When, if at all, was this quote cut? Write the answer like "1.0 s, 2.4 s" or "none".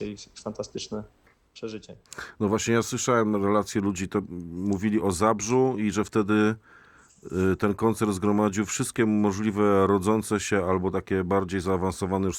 none